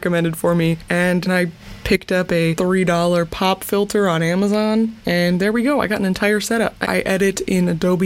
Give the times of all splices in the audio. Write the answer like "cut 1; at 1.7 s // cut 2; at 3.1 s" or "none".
cut 1; at 1.3 s // cut 2; at 6.8 s